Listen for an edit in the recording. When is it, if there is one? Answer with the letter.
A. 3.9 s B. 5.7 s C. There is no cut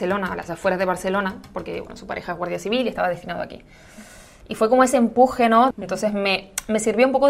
B